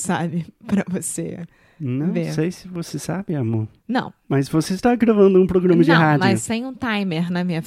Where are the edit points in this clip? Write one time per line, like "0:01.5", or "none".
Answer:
none

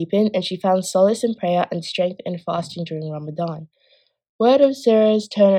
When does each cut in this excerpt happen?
none

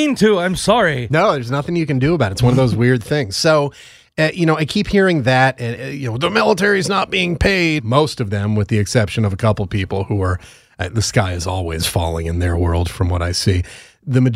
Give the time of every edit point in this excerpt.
0:07.8

